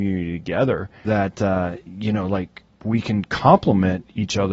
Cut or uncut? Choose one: cut